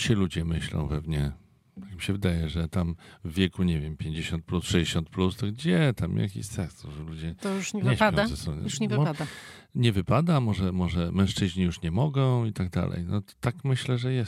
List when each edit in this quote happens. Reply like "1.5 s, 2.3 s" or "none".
none